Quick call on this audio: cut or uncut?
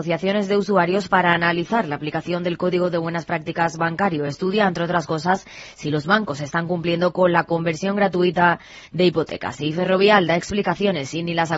uncut